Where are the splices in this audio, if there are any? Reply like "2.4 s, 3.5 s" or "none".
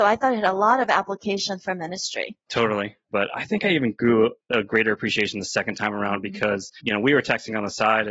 3.1 s